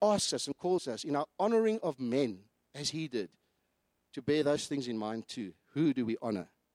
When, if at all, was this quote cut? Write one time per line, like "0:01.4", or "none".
none